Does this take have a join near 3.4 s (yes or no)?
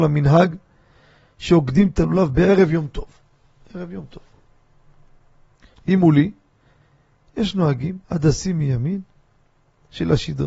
no